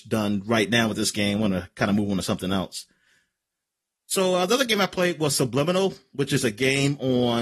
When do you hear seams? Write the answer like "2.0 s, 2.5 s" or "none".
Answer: none